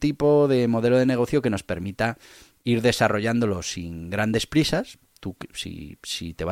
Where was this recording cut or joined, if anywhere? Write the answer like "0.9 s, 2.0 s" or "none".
none